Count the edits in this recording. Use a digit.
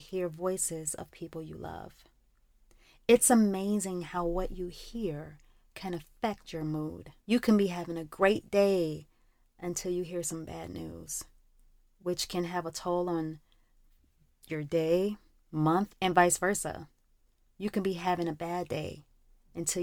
2